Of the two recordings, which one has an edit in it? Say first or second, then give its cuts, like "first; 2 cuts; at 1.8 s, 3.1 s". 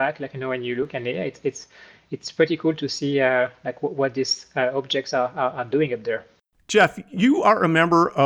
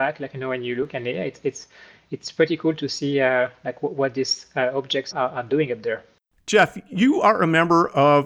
second; 1 cut; at 5.1 s